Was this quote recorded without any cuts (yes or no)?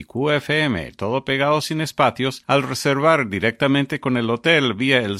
yes